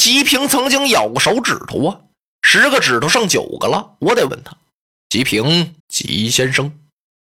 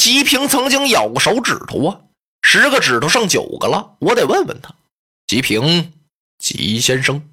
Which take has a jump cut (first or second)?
first